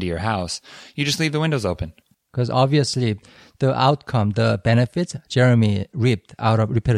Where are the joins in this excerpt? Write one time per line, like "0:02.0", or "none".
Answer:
0:02.1

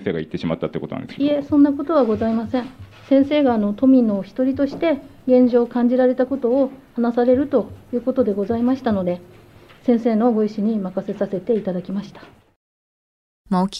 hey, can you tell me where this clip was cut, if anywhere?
none

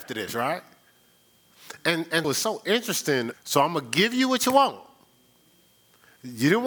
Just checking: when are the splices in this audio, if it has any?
0:02.2
0:03.3

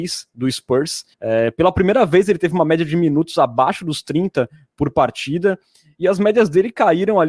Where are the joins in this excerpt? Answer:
0:01.1

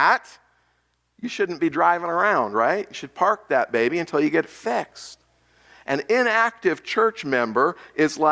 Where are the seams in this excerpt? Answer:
none

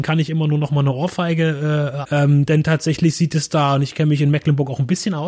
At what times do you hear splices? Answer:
0:02.0

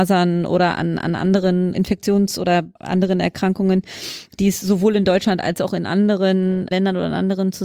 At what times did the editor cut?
0:02.8

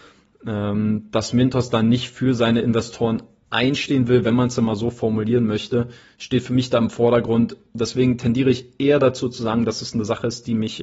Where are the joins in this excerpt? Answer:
none

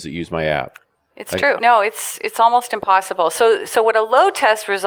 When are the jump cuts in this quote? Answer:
0:01.6

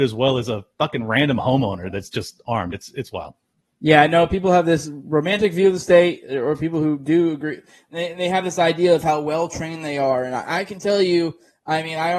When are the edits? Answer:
none

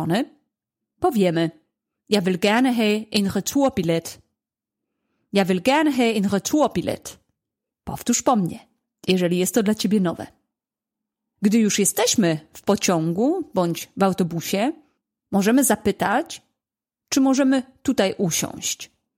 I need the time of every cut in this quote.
none

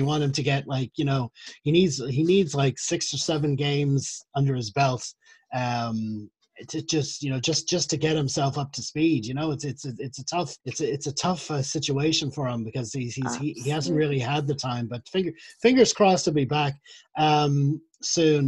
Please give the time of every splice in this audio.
0:10.6

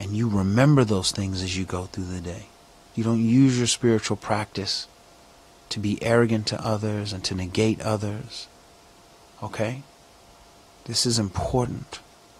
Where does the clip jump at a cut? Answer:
0:02.9

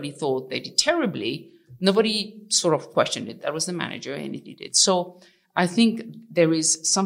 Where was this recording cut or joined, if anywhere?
0:03.4

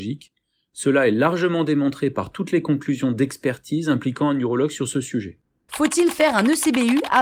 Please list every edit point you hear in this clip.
0:05.7

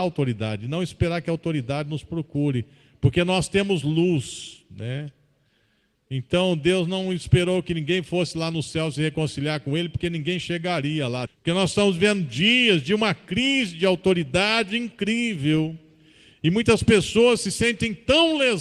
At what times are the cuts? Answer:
0:11.3

